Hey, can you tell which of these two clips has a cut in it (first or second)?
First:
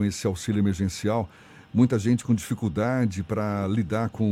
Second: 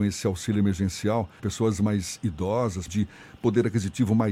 second